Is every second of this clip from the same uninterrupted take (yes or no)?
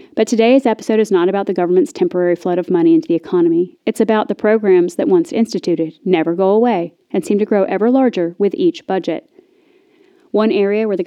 yes